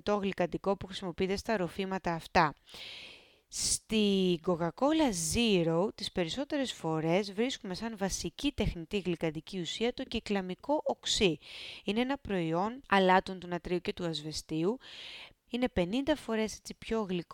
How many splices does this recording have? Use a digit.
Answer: 1